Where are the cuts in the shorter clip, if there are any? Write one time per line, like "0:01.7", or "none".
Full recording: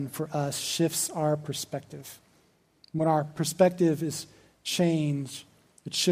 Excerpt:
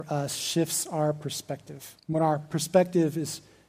0:02.0